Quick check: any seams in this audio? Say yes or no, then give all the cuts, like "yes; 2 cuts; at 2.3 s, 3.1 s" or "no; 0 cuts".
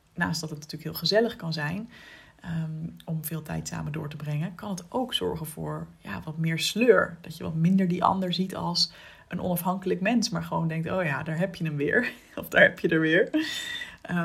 no; 0 cuts